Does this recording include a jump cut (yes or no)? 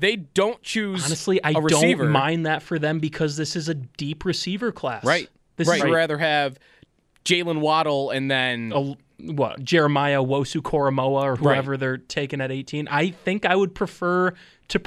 yes